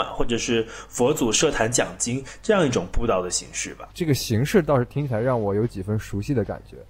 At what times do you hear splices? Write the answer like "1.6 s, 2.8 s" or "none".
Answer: 3.9 s